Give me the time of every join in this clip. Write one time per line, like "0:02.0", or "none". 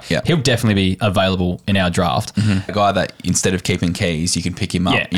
0:02.7